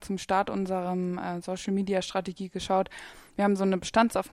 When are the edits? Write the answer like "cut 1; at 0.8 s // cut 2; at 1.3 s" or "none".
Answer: none